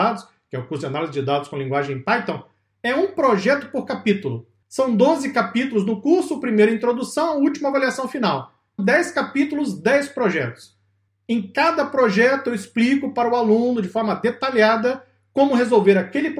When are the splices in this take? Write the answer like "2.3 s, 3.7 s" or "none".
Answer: 8.8 s